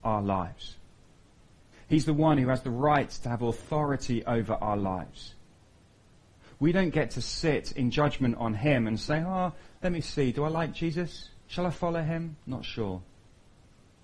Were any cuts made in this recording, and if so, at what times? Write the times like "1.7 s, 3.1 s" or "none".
11.4 s